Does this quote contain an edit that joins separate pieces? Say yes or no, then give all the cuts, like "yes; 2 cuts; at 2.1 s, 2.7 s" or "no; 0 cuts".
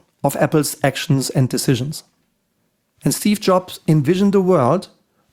no; 0 cuts